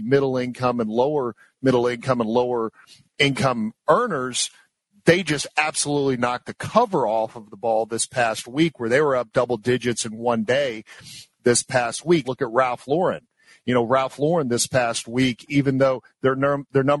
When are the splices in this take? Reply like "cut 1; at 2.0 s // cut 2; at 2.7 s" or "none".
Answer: cut 1; at 12.2 s